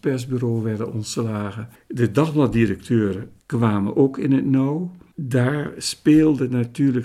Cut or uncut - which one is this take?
cut